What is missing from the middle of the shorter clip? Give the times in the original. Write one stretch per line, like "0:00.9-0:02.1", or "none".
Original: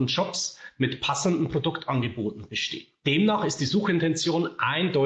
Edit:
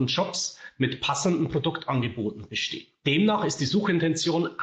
none